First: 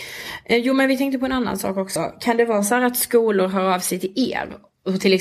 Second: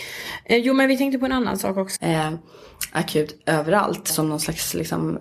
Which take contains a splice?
second; 2 cuts; at 2.0 s, 4.1 s

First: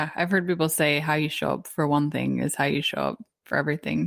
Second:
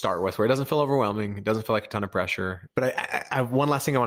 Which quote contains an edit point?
second; 1 cut; at 2.7 s

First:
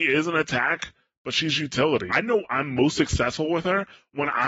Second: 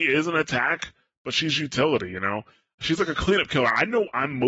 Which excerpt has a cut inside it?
first; 1 cut; at 2.1 s

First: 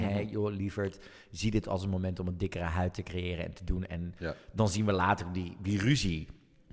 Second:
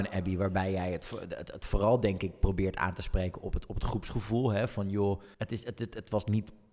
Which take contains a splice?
second; 1 cut; at 5.3 s

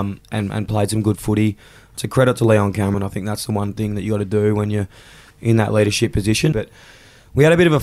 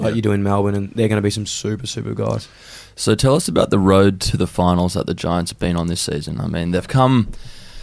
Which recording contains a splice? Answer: first; 2 cuts; at 2.9 s, 6.5 s

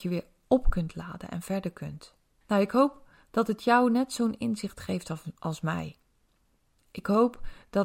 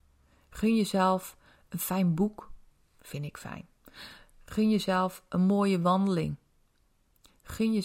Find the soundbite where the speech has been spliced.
first; 1 cut; at 2.4 s

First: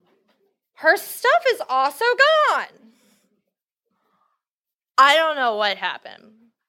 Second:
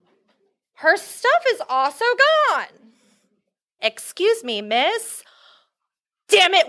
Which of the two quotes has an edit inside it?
second; 1 cut; at 3.8 s

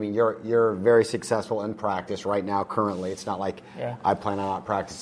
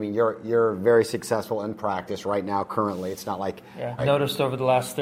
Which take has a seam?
second; 1 cut; at 4.0 s

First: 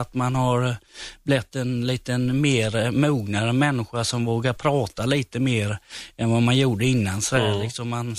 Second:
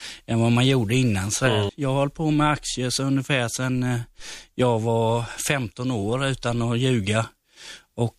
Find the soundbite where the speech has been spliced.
second; 1 cut; at 1.7 s

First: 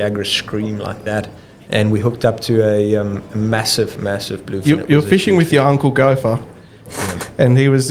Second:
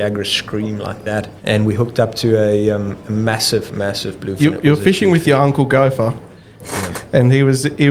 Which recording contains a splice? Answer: second; 1 cut; at 1.4 s

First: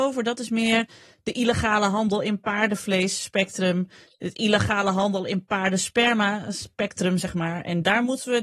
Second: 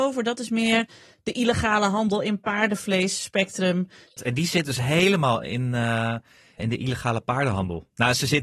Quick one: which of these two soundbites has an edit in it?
second; 2 cuts; at 4.2 s, 6.6 s

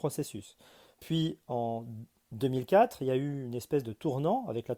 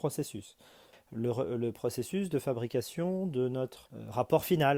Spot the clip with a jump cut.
second; 1 cut; at 0.9 s

